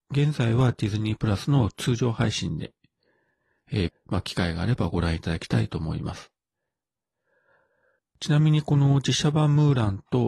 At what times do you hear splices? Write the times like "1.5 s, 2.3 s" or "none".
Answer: 3.9 s, 8.0 s